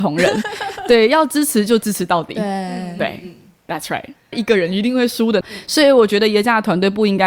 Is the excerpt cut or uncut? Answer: cut